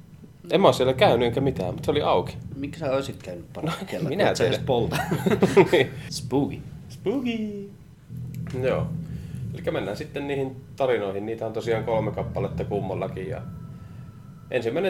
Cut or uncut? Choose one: cut